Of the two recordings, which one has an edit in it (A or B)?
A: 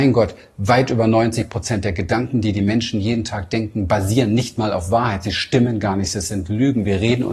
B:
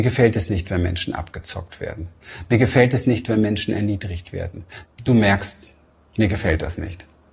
B